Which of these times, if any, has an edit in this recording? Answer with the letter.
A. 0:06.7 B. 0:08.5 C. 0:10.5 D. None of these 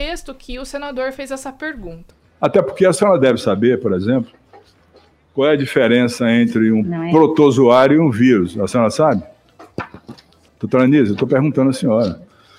C